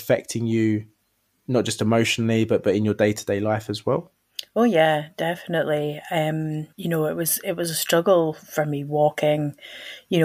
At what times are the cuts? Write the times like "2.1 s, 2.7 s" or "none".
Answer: 6.7 s